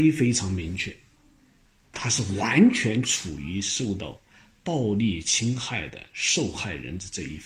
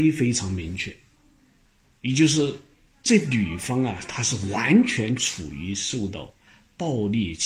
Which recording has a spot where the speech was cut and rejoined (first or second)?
first